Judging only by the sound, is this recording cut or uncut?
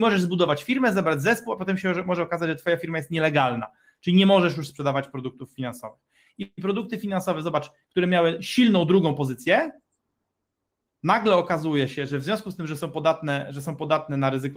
uncut